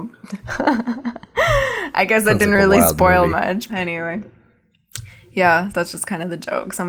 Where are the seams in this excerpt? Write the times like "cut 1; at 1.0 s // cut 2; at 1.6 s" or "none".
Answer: cut 1; at 3.7 s // cut 2; at 5.7 s